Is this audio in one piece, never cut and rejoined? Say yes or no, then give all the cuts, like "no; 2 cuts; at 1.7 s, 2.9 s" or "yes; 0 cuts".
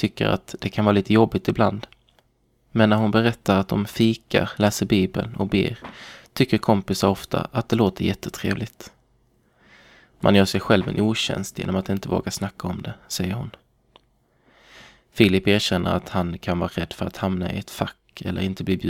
no; 1 cut; at 4.6 s